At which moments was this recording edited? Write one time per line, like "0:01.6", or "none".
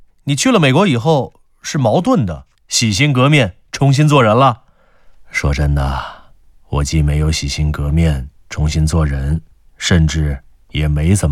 0:02.5